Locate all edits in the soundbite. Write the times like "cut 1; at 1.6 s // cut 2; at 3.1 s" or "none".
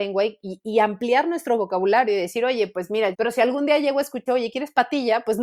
cut 1; at 3.1 s // cut 2; at 4.3 s